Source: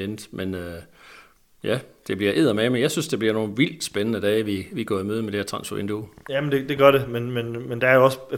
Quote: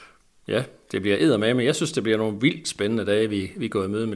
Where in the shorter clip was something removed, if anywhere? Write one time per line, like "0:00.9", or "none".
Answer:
none